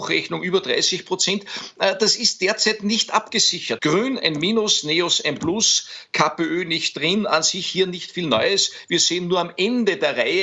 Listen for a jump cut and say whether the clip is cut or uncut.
cut